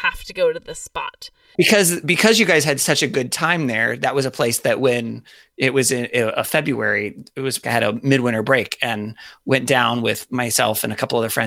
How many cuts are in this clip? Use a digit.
2